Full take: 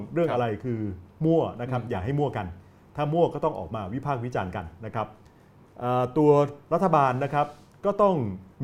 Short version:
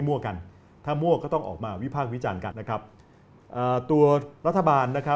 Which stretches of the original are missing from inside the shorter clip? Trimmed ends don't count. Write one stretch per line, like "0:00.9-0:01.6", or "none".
0:04.6-0:04.8